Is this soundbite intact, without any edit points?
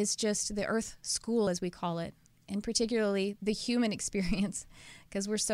yes; 0 cuts

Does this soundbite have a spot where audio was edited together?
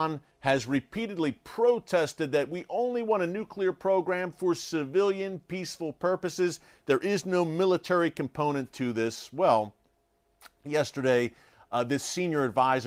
no; 0 cuts

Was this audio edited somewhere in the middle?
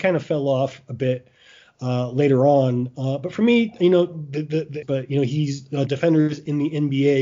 yes; 2 cuts; at 4.8 s, 5.9 s

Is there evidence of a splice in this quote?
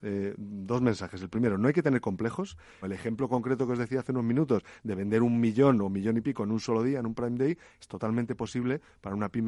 yes; 1 cut; at 2.8 s

